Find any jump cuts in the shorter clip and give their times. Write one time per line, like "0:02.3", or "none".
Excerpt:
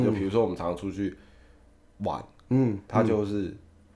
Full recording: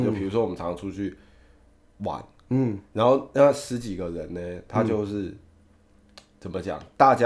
0:02.9